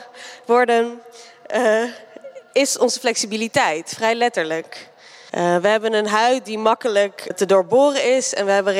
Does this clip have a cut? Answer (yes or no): yes